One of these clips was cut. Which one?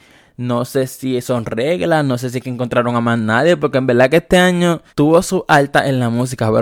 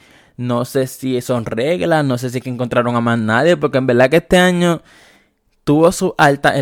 first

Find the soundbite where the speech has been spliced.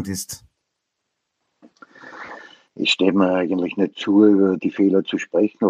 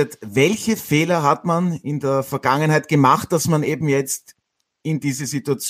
first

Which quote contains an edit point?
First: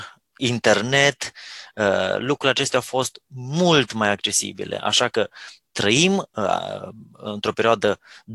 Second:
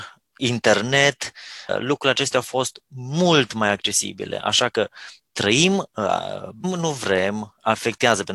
second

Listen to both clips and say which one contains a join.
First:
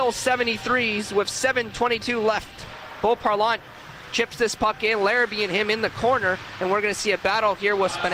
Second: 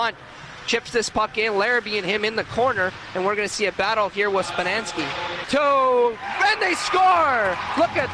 second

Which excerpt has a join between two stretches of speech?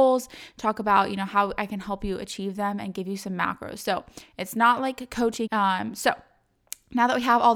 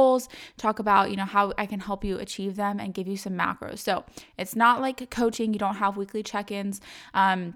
first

